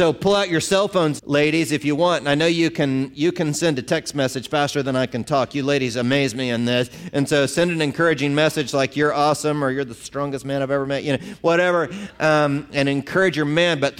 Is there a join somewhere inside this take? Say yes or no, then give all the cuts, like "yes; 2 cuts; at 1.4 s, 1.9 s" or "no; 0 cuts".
yes; 1 cut; at 1.2 s